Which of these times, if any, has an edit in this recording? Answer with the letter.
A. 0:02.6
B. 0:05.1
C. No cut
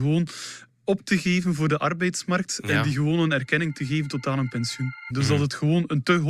B